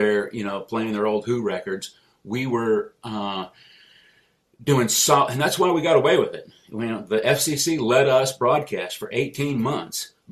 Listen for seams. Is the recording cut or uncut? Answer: uncut